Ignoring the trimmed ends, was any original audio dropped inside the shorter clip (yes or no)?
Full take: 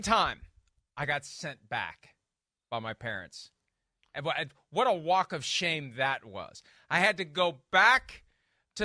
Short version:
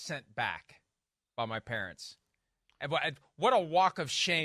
no